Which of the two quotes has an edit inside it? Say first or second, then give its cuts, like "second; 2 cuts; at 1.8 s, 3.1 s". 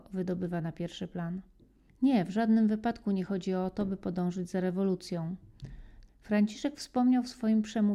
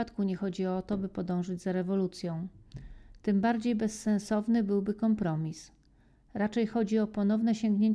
first; 2 cuts; at 1.9 s, 6.1 s